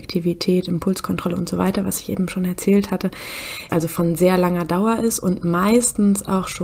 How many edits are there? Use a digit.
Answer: 1